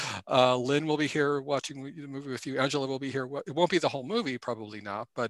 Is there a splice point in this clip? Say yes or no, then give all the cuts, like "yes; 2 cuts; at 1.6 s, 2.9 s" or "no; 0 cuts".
no; 0 cuts